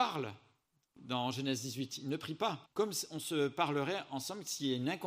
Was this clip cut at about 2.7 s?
yes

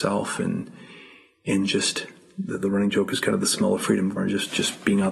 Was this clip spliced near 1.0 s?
no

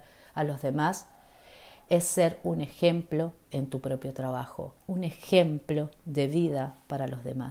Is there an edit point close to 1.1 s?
no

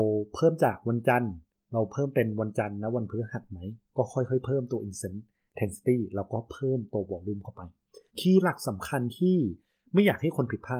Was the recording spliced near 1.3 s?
no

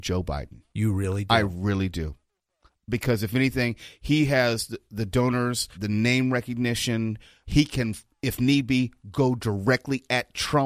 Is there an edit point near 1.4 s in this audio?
no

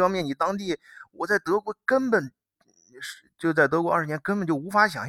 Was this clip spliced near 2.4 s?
no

